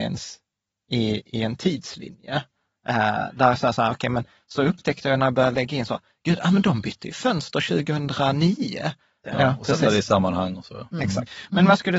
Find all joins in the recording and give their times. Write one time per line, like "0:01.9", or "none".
0:09.2